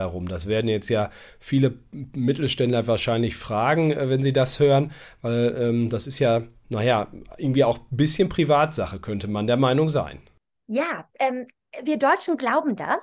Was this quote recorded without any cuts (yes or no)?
yes